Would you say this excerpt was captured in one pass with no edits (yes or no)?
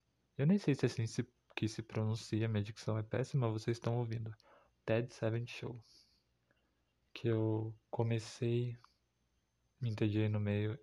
no